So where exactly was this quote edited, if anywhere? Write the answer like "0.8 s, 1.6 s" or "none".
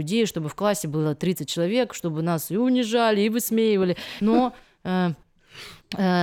4.2 s

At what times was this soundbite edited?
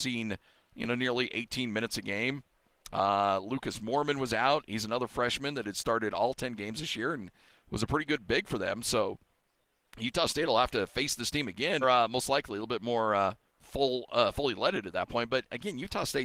11.8 s, 13.5 s

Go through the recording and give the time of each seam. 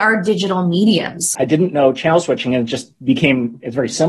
1.3 s

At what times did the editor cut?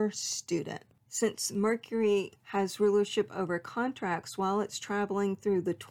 2.4 s

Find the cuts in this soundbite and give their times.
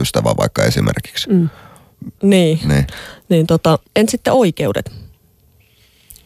2.2 s, 3.9 s

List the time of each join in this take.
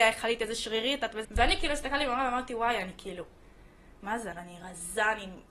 1.2 s, 4.3 s

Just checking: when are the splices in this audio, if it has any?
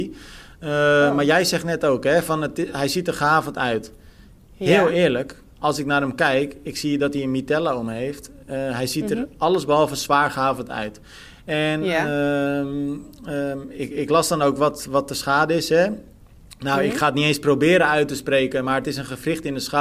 none

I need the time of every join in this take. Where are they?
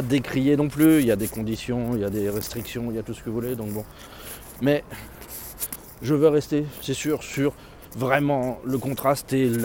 none

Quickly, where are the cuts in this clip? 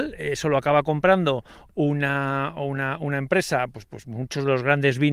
4.0 s

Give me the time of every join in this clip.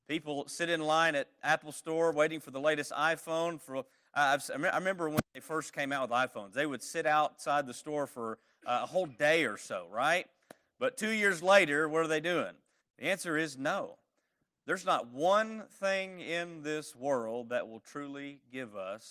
12.8 s

